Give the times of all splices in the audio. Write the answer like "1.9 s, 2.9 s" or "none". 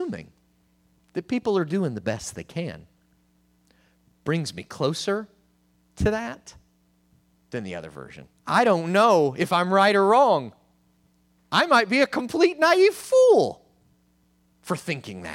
8.4 s